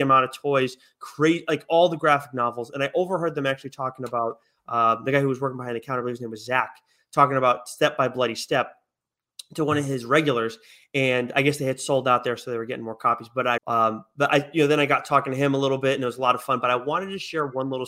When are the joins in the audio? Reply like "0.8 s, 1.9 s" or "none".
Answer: 13.6 s